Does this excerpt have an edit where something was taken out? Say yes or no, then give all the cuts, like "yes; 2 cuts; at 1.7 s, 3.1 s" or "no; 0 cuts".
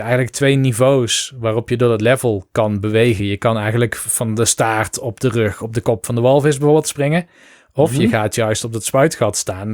no; 0 cuts